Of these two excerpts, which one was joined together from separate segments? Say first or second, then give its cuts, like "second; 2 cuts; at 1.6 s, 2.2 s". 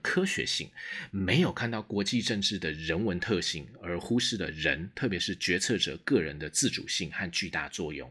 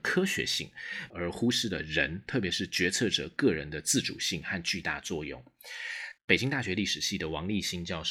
second; 2 cuts; at 1.1 s, 6.2 s